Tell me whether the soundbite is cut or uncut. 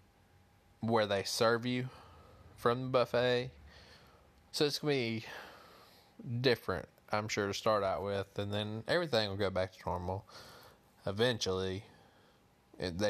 cut